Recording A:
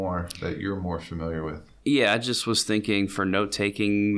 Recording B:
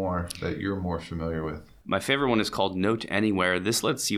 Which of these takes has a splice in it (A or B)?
B